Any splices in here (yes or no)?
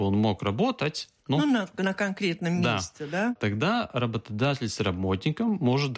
no